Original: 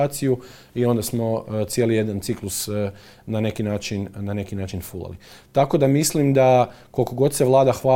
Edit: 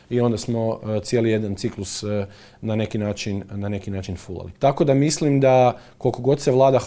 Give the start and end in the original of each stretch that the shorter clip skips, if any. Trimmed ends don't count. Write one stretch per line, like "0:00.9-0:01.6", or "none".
0:05.2-0:05.5